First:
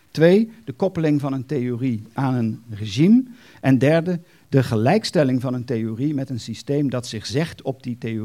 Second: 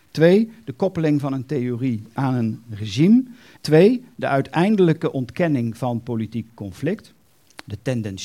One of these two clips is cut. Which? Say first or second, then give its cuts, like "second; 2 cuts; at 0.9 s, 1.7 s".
second; 1 cut; at 3.6 s